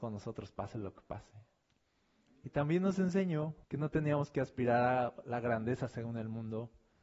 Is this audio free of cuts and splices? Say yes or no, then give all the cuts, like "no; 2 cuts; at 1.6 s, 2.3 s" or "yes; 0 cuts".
no; 1 cut; at 3.6 s